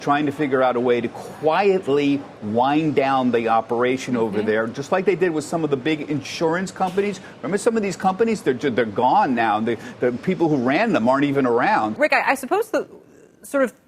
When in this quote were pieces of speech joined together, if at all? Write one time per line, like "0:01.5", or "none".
0:12.0